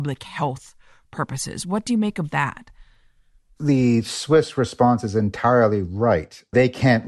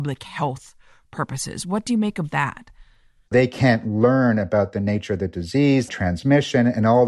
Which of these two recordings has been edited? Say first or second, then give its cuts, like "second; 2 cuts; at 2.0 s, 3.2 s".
second; 2 cuts; at 3.3 s, 5.9 s